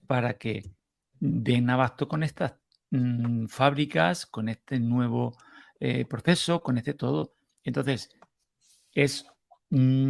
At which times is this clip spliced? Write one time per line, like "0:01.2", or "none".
none